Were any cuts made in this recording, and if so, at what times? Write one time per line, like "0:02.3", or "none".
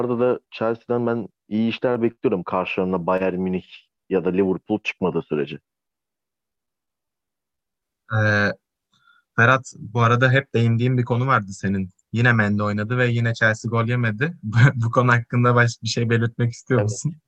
none